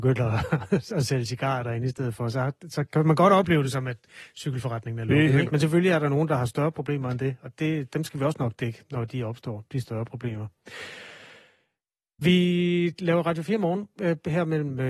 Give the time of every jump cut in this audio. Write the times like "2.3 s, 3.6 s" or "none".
5.5 s